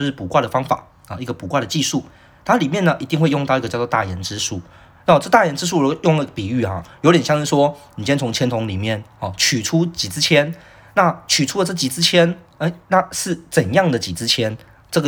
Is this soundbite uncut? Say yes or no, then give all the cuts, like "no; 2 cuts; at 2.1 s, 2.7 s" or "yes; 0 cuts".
yes; 0 cuts